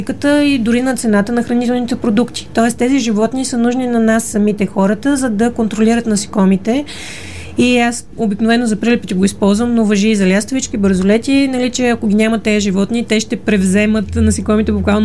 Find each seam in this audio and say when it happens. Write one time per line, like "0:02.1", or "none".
none